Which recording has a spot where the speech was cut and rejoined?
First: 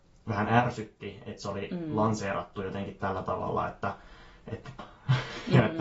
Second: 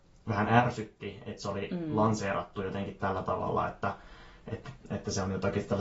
first; 1 cut; at 4.8 s

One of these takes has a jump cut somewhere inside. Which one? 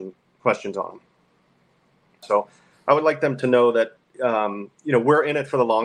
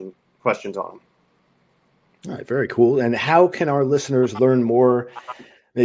first; 1 cut; at 2.2 s

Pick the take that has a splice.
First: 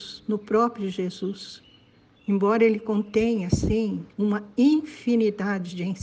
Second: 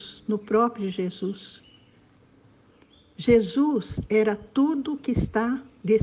first; 2 cuts; at 2.2 s, 4.1 s

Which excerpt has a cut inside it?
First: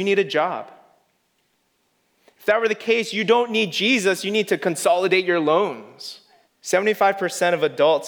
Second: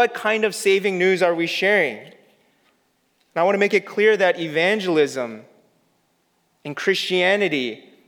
first; 1 cut; at 6.4 s

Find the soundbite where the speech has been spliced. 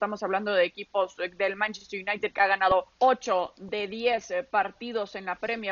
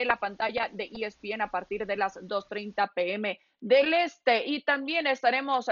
first; 1 cut; at 2.9 s

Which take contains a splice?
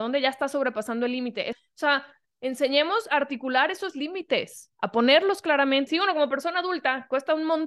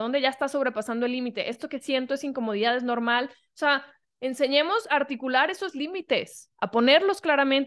first; 2 cuts; at 1.5 s, 5.9 s

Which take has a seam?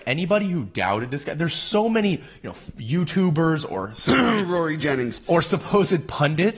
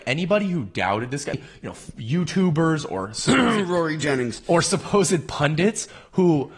second; 1 cut; at 1.3 s

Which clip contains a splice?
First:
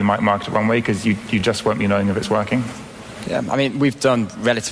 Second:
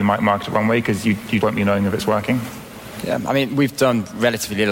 second; 1 cut; at 1.4 s

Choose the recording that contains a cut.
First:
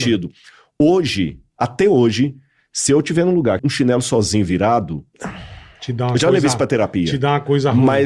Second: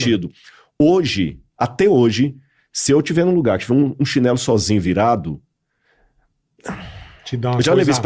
first; 2 cuts; at 3.6 s, 5.1 s

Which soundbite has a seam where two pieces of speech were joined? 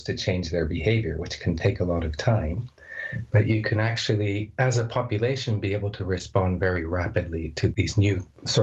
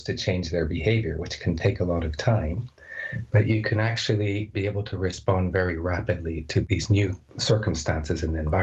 second; 1 cut; at 4.5 s

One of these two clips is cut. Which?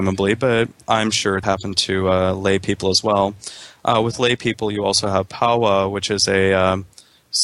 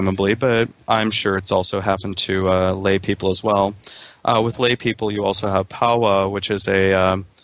first; 1 cut; at 1.4 s

